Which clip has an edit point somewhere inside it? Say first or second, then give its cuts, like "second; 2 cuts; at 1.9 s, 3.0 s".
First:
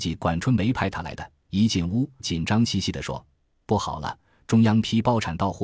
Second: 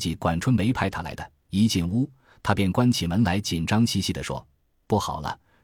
first; 1 cut; at 2.2 s